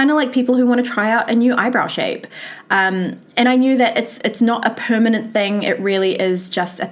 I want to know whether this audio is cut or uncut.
uncut